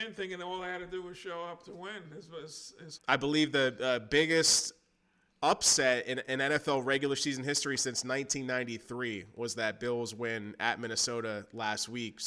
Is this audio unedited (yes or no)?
no